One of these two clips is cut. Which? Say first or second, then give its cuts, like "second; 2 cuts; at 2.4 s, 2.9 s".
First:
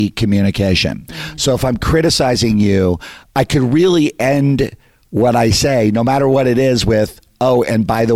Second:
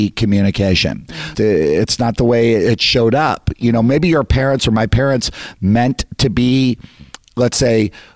second; 1 cut; at 1.3 s